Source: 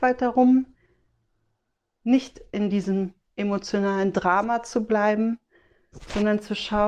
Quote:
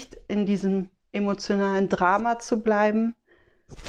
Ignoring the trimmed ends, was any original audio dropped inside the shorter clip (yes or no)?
no